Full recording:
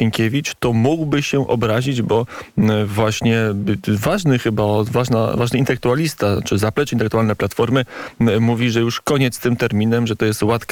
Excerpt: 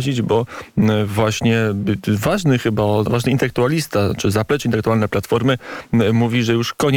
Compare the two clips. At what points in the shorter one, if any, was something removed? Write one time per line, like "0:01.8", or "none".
0:03.1